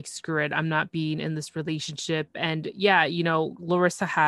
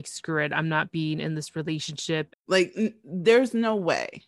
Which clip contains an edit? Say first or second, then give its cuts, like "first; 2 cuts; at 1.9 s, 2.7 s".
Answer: second; 1 cut; at 2.3 s